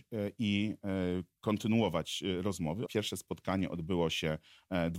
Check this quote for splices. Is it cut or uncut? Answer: cut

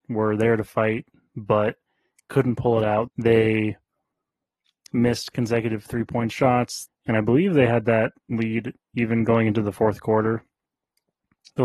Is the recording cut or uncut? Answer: cut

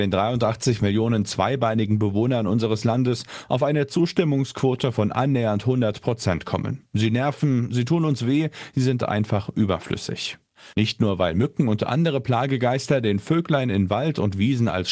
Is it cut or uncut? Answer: cut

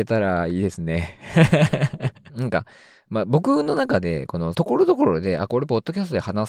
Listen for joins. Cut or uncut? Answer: cut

